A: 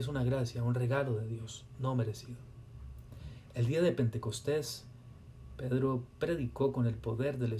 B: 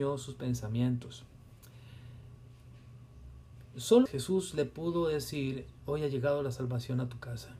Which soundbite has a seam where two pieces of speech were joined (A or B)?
B